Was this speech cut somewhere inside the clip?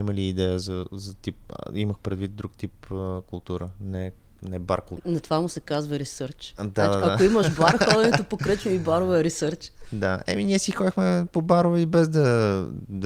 yes; 1 cut; at 5.0 s

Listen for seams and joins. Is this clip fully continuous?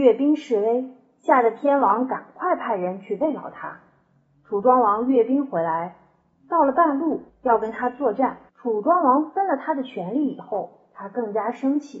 no; 2 cuts; at 7.3 s, 8.5 s

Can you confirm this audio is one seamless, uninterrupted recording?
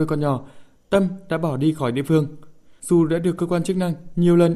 yes; 0 cuts

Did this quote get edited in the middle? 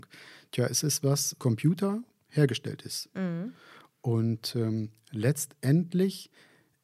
yes; 1 cut; at 1.4 s

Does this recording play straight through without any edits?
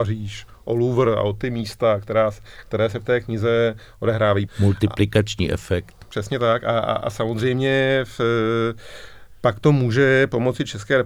no; 1 cut; at 4.5 s

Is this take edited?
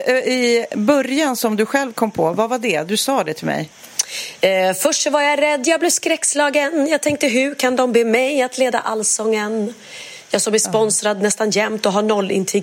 no; 0 cuts

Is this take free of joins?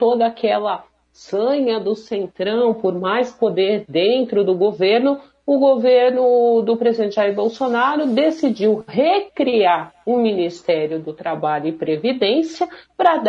yes; 0 cuts

